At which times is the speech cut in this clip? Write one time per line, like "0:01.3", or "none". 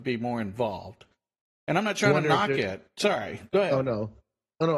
none

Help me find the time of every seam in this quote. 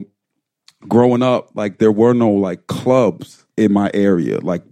0:03.5

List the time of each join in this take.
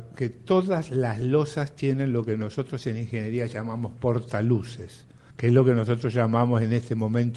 0:05.3

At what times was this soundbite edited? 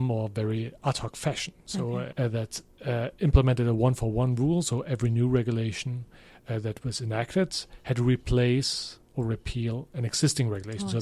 0:02.1

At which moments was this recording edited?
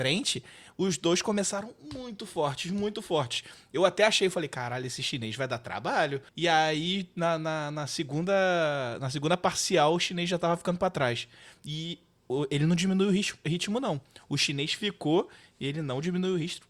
0:06.3

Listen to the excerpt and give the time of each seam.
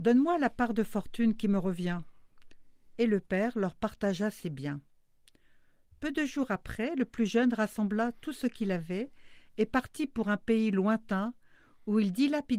none

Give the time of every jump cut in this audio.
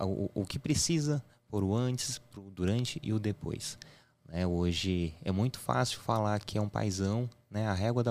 none

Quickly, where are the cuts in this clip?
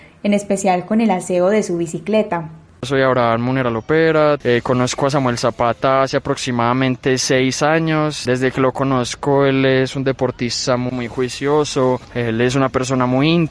0:10.9

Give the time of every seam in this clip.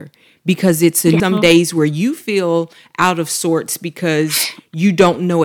0:01.2

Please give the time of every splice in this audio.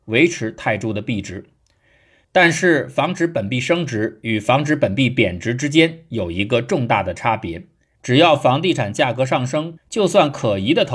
0:08.0
0:09.8

